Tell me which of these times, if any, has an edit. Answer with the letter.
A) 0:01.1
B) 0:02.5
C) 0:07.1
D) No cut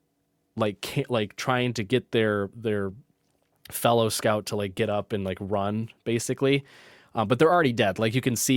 B